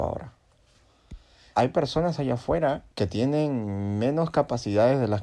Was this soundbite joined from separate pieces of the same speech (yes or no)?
yes